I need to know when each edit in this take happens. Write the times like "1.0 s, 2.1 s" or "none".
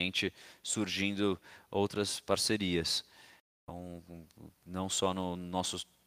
none